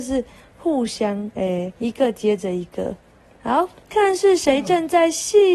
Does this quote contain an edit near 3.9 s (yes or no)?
yes